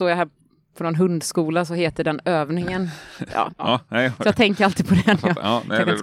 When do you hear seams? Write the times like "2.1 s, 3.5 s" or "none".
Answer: 3.5 s